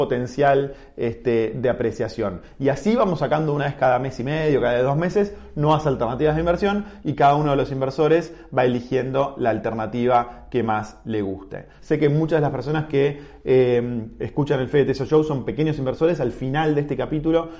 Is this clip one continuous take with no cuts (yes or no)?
no